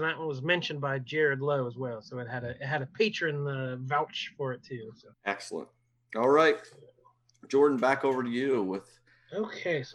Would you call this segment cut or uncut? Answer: cut